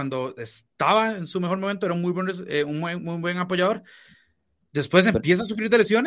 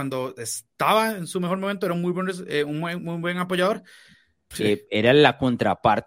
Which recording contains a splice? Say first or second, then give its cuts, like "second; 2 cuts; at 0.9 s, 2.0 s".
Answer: second; 1 cut; at 4.5 s